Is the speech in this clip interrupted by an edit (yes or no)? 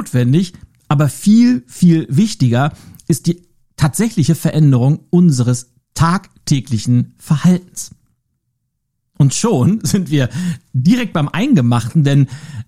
no